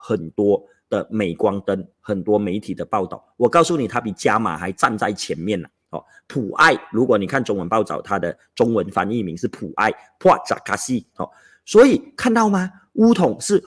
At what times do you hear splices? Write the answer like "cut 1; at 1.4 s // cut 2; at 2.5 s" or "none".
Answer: cut 1; at 11.1 s